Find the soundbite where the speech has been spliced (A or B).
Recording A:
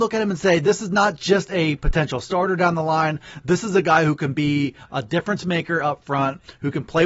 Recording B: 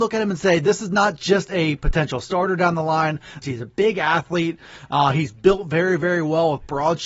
B